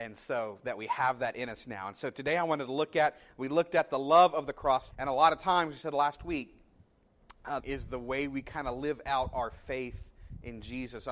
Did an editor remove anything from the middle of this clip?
yes; 2 cuts; at 4.9 s, 7.6 s

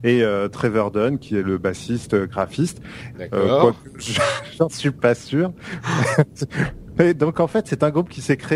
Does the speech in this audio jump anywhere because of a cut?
yes; 1 cut; at 3.1 s

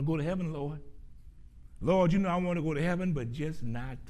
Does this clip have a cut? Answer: no; 0 cuts

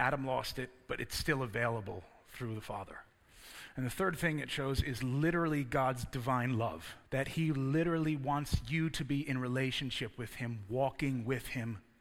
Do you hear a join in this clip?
yes; 1 cut; at 7.0 s

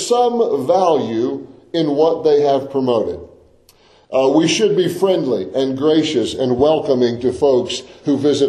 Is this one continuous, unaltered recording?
yes; 0 cuts

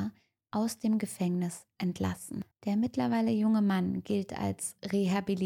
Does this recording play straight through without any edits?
no; 1 cut; at 2.5 s

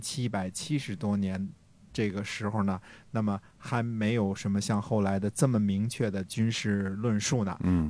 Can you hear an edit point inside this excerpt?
no; 0 cuts

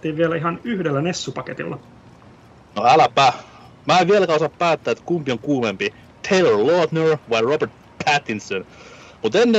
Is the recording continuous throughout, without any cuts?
yes; 0 cuts

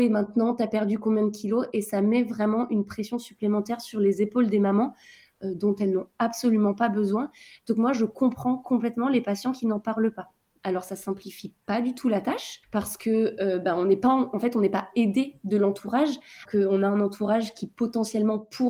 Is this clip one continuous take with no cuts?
no; 2 cuts; at 12.6 s, 16.5 s

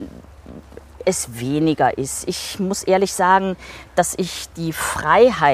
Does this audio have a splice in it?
no; 0 cuts

